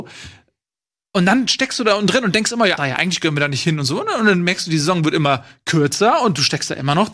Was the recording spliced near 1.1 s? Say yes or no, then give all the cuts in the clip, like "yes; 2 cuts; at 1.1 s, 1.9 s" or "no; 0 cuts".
no; 1 cut; at 2.8 s